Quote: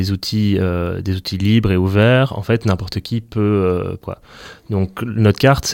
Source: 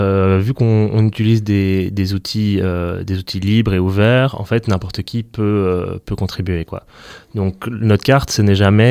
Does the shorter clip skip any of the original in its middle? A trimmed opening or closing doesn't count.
yes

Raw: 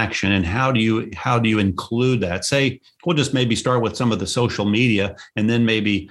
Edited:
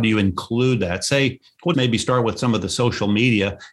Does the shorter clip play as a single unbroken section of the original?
no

